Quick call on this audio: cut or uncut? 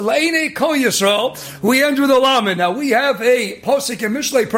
uncut